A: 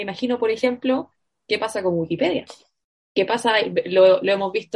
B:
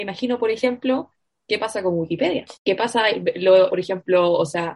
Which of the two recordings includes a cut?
B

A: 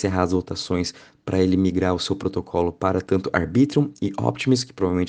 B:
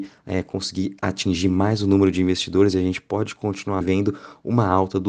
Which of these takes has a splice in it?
B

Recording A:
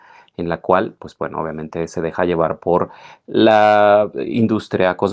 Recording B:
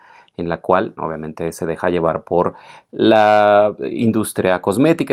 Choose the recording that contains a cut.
B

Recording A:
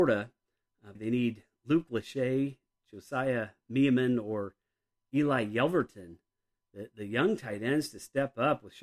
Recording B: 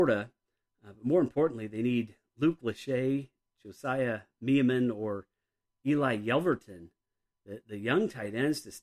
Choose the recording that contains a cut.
A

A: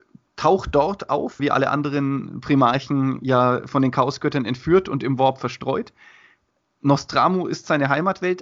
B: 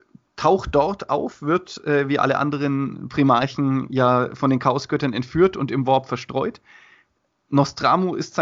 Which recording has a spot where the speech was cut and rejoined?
A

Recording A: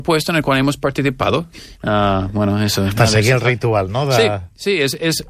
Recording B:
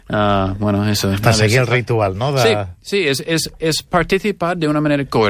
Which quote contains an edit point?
A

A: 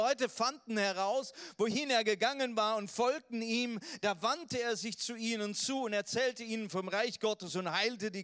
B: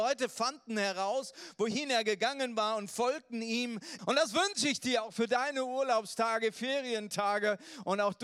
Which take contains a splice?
B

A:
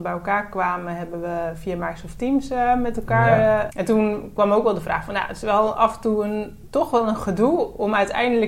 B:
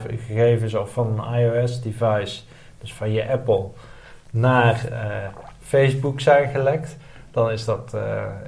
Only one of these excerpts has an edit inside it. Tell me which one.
A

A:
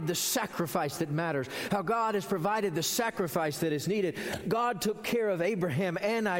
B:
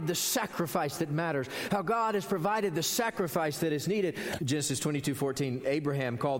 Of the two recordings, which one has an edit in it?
B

